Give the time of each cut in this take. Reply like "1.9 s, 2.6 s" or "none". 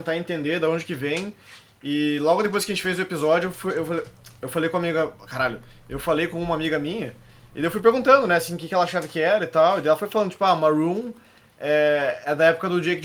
none